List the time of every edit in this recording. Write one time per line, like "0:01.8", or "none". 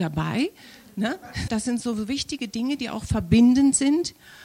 0:01.5

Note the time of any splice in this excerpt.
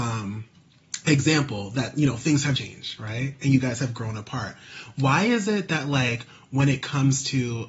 0:02.6

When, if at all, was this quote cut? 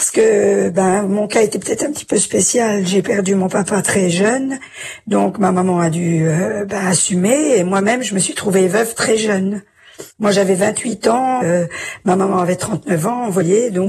0:10.1
0:11.4

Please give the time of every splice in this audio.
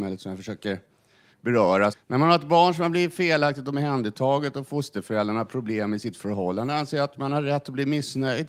0:01.9

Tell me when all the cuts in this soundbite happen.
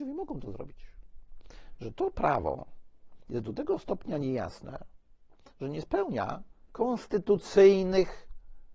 none

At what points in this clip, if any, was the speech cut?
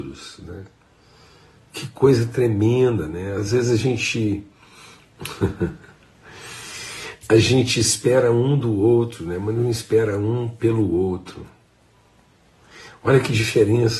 none

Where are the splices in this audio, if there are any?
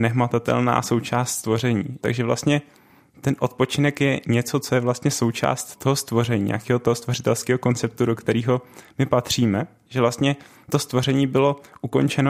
0:02.0
0:05.8
0:09.9

